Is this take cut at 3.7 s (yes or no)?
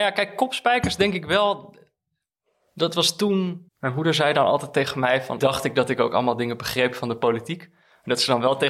yes